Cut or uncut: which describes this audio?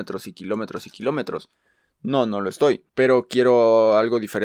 cut